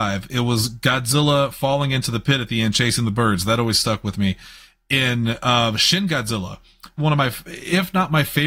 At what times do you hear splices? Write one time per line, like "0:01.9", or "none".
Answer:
0:07.0